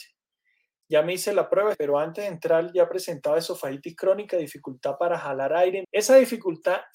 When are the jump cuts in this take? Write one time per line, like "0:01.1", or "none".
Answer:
0:01.7
0:05.8